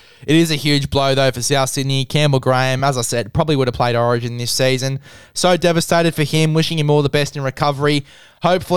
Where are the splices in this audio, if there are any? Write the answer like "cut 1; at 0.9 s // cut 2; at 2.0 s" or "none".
none

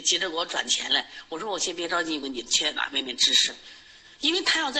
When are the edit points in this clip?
cut 1; at 2.2 s

